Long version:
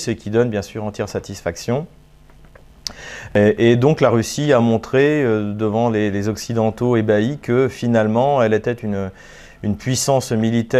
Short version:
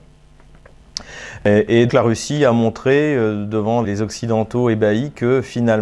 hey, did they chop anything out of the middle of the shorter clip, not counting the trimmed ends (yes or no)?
yes